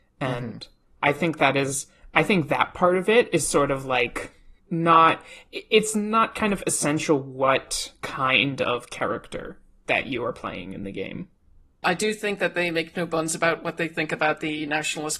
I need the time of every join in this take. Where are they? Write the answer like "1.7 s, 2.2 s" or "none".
4.6 s